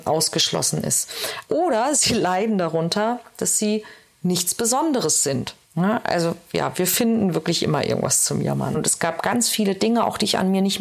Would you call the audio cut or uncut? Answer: cut